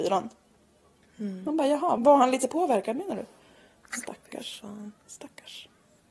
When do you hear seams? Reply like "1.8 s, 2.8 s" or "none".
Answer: 2.0 s